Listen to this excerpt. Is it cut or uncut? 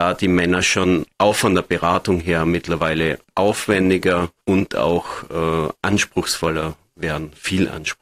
cut